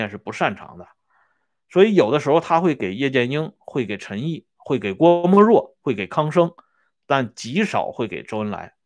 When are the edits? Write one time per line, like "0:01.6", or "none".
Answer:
none